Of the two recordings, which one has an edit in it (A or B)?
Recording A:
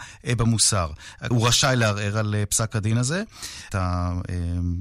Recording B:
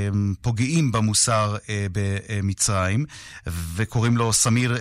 A